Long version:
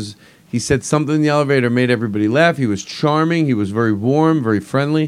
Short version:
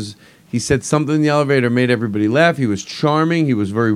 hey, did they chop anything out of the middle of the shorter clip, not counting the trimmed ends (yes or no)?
no